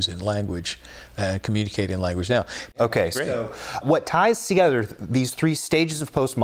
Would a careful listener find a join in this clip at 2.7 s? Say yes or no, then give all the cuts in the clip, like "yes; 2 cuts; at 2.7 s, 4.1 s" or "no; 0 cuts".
yes; 2 cuts; at 2.7 s, 3.8 s